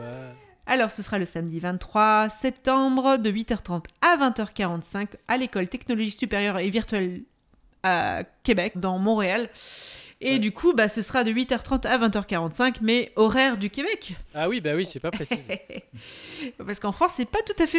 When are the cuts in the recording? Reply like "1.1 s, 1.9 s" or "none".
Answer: 8.7 s